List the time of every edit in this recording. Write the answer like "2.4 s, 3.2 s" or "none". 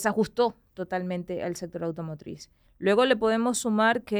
2.7 s